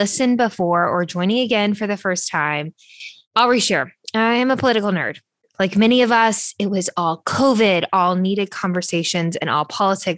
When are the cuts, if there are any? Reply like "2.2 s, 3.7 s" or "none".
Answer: 5.4 s